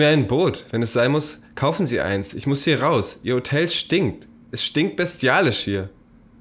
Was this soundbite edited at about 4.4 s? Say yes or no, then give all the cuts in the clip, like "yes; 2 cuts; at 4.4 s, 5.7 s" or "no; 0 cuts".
no; 0 cuts